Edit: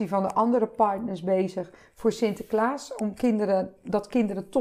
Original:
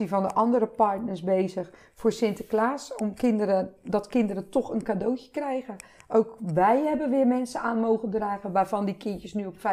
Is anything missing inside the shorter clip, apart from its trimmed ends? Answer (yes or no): no